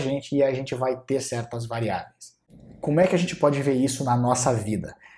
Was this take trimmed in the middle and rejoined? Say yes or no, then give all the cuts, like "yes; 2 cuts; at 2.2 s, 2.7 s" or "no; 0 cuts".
no; 0 cuts